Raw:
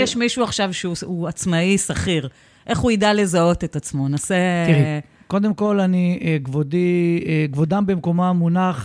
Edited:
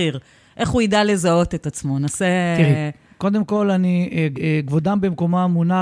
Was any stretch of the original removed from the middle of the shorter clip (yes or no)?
yes